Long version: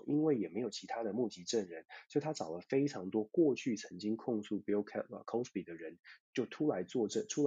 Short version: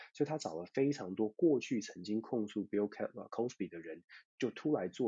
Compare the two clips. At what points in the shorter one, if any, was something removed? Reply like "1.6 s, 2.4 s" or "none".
none